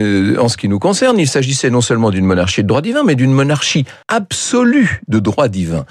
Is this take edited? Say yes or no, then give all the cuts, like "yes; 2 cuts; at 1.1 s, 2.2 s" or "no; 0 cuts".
yes; 1 cut; at 4.0 s